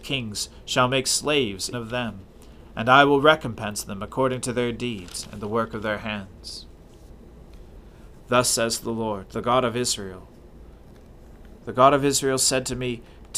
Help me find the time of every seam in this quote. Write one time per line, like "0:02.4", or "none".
0:01.7